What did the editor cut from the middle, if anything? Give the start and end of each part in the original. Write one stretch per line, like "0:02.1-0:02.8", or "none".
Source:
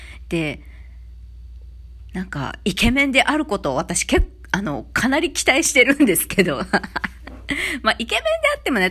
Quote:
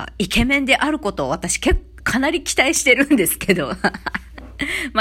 0:04.5-0:04.9